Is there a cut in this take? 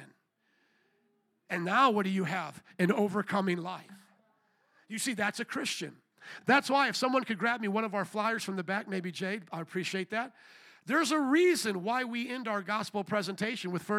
no; 0 cuts

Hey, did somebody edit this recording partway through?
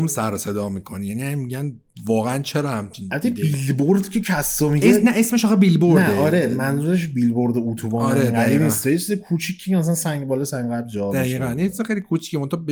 no; 0 cuts

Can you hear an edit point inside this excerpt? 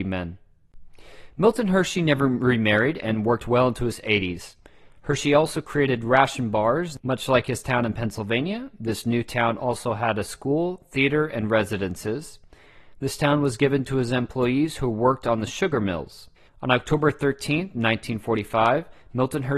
yes; 2 cuts; at 7.0 s, 16.5 s

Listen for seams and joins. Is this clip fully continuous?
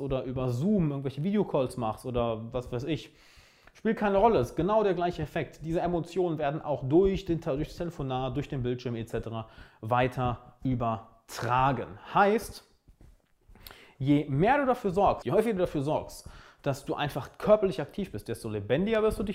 no; 1 cut; at 15.2 s

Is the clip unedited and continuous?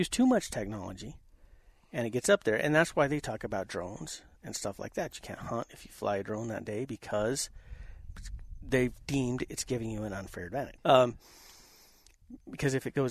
no; 1 cut; at 10.8 s

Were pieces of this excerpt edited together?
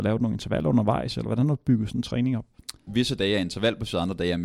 yes; 1 cut; at 2.9 s

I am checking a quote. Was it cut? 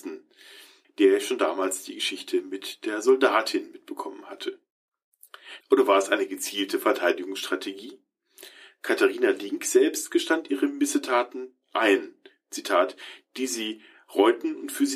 yes; 1 cut; at 5.6 s

